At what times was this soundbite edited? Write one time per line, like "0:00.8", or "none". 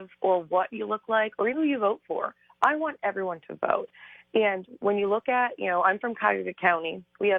0:01.5